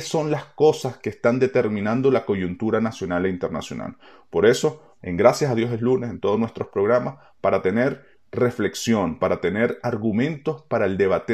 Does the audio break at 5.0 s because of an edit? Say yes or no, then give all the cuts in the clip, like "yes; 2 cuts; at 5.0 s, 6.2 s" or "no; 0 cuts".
yes; 1 cut; at 5.0 s